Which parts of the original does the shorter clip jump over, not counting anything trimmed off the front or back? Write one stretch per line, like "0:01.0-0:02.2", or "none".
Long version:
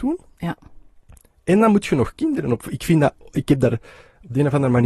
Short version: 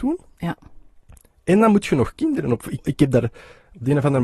0:02.8-0:03.3